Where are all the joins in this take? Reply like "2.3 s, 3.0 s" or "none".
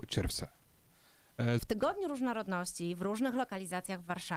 1.6 s